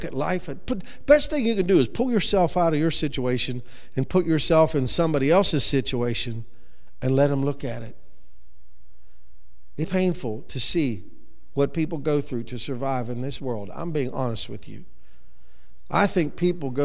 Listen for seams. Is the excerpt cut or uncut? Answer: cut